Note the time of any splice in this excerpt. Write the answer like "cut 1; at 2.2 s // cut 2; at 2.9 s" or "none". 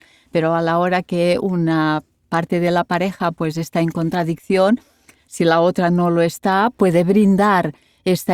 none